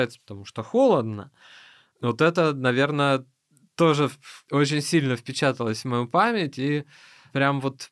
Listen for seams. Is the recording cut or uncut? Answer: uncut